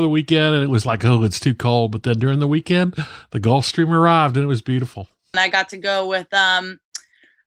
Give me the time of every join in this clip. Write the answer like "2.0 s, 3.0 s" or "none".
5.3 s